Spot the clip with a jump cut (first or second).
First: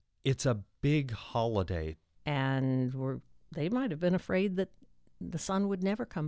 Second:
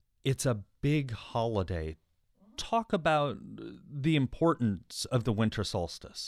first